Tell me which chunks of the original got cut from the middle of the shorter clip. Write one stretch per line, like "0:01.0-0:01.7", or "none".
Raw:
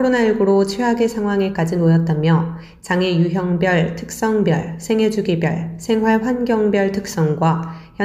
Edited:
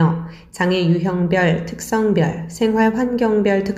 0:04.8-0:05.8